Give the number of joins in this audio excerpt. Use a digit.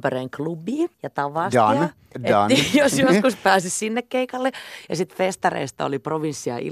1